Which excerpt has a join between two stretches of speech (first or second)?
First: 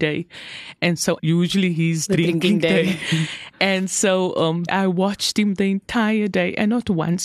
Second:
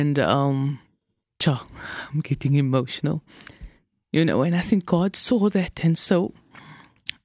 first